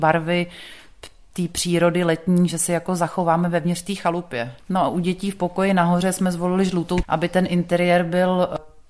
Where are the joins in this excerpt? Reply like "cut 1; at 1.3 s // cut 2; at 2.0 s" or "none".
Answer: cut 1; at 4.6 s // cut 2; at 7.0 s